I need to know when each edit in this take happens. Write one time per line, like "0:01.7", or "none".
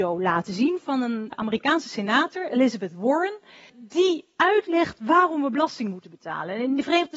0:01.3
0:03.7